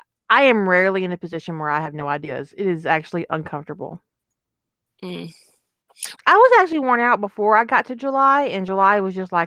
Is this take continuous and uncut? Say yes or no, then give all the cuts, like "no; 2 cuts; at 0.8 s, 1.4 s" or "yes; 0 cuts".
no; 1 cut; at 6.2 s